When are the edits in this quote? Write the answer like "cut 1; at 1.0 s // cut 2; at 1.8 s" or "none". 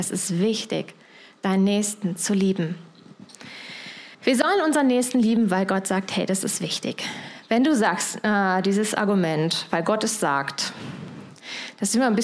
cut 1; at 4.1 s